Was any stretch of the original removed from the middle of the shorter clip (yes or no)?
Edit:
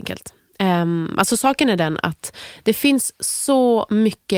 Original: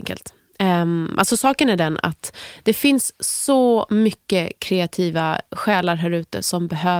no